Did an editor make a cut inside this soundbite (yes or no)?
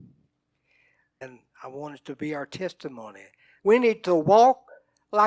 yes